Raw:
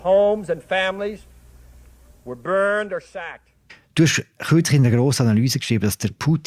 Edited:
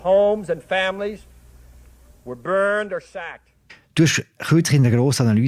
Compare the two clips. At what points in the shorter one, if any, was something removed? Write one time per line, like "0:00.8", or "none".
none